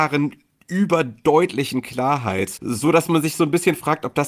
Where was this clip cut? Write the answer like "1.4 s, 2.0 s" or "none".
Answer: 2.6 s